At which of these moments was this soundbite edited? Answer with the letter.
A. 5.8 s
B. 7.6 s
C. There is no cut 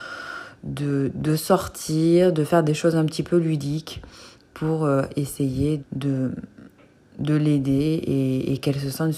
A